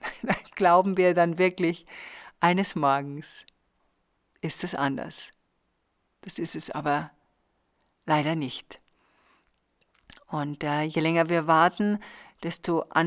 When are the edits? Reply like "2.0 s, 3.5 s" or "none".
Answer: none